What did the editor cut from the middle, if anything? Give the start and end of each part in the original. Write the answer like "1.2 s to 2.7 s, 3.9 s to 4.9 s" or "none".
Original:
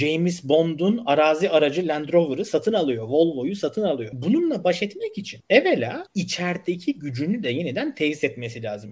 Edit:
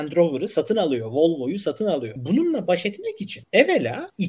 none